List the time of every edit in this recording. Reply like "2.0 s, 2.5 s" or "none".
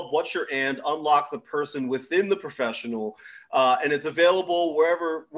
none